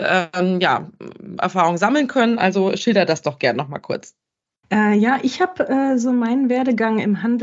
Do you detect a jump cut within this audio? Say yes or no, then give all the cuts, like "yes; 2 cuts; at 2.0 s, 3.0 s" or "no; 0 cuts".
yes; 1 cut; at 4.6 s